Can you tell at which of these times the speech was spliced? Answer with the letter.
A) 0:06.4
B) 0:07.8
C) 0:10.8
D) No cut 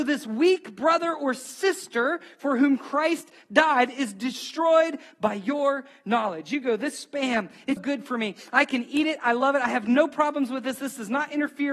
B